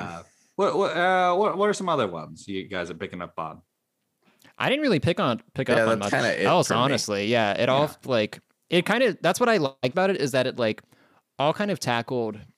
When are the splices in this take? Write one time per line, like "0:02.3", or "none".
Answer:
none